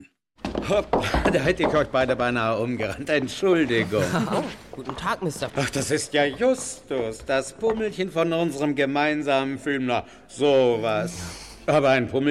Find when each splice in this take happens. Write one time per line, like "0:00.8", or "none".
0:05.5